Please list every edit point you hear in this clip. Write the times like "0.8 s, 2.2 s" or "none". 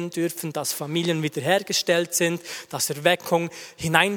none